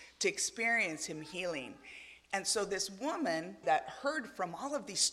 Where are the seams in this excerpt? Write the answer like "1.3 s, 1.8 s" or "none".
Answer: 3.6 s